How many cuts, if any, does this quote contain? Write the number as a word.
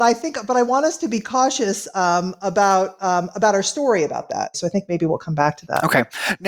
one